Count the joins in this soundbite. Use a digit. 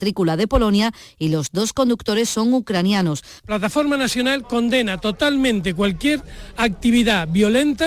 1